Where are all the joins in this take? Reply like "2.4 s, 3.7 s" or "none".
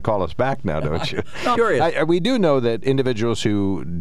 1.6 s